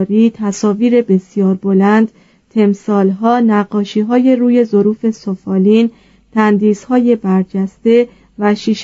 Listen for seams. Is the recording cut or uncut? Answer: uncut